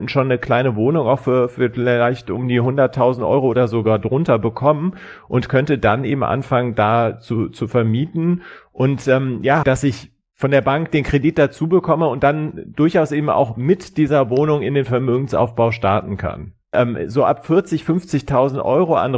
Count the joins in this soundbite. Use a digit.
2